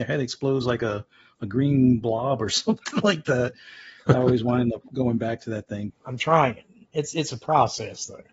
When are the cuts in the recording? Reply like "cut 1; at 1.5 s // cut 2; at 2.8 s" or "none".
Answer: cut 1; at 5.9 s

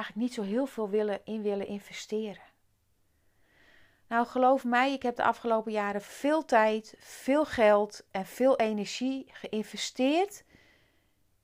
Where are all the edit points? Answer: none

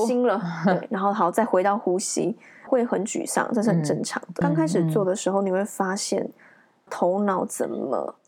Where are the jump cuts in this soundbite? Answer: cut 1; at 2.7 s // cut 2; at 4.4 s // cut 3; at 6.9 s

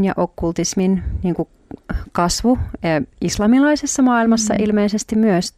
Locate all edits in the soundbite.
none

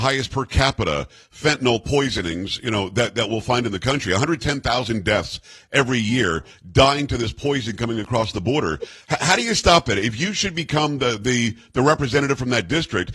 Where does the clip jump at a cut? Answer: none

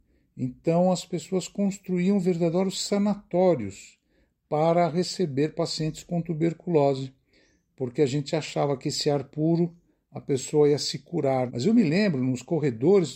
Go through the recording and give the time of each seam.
cut 1; at 11.5 s

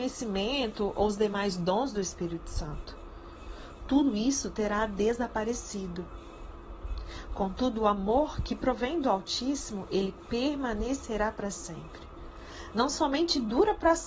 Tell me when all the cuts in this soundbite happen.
cut 1; at 12.7 s

